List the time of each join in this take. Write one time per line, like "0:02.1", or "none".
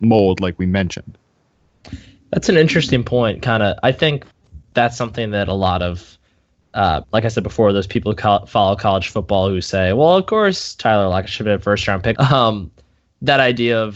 0:07.0
0:12.1